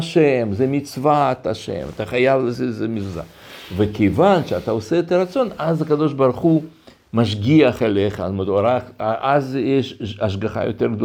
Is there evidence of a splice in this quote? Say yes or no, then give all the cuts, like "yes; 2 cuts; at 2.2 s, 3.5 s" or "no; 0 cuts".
no; 0 cuts